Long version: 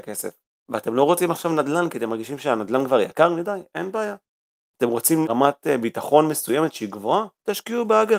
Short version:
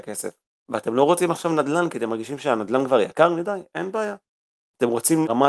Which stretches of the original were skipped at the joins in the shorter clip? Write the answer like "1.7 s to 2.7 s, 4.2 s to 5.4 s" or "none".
none